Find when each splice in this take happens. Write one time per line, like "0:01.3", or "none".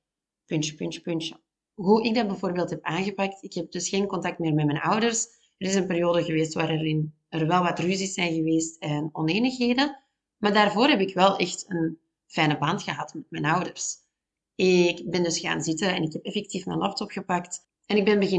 none